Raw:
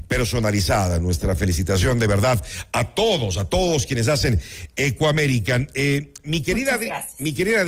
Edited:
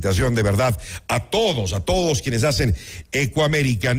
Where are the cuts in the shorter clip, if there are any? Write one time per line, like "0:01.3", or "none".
none